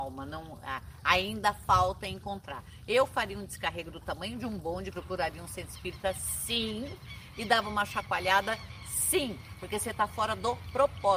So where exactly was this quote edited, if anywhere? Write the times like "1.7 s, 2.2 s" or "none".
4.9 s